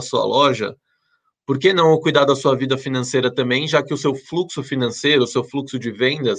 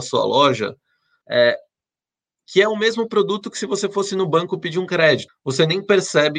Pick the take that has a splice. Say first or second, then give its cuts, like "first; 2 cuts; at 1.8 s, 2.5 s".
second; 2 cuts; at 1.2 s, 5.3 s